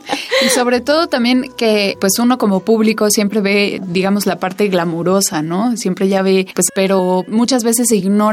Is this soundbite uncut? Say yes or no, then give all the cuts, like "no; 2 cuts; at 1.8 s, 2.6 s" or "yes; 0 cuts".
no; 1 cut; at 6.7 s